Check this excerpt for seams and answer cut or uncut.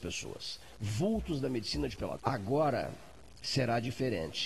cut